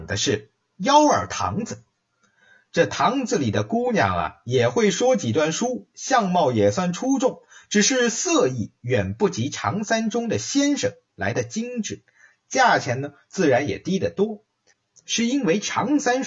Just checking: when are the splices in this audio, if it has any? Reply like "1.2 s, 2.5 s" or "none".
15.0 s